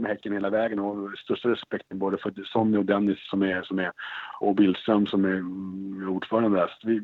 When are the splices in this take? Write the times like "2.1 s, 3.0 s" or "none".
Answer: 4.4 s